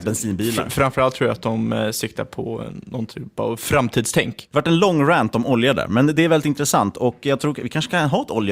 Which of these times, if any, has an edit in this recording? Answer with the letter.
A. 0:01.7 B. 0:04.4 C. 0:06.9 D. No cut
D